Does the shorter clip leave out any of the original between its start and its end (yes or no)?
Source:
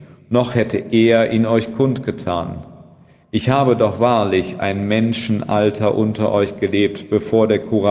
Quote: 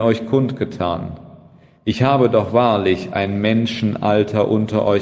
no